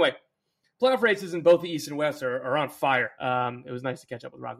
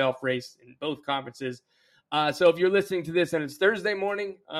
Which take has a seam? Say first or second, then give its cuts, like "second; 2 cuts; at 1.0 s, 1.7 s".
first; 1 cut; at 3.2 s